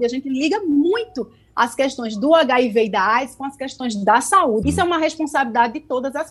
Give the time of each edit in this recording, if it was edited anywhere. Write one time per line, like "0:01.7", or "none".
0:04.6